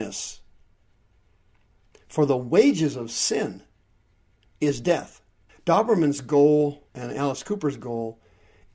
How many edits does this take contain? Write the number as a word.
three